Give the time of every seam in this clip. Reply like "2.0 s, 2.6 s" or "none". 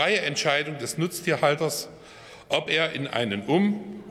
none